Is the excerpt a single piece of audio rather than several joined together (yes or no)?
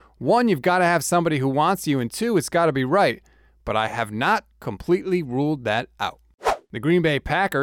yes